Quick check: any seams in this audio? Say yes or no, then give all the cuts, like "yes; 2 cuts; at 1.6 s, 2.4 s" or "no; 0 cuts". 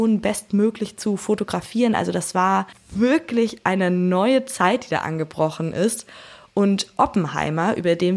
no; 0 cuts